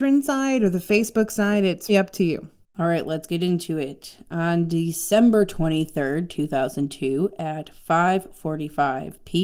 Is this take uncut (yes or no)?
no